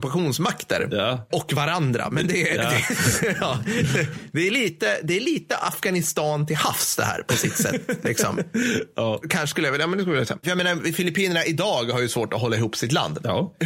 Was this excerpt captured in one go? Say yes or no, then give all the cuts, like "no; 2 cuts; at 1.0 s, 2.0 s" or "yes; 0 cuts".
yes; 0 cuts